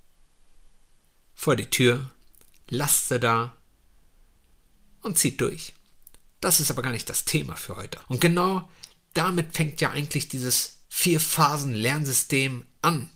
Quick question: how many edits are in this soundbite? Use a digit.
2